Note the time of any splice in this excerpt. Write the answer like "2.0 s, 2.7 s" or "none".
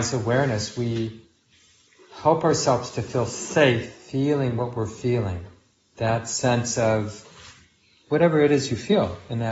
none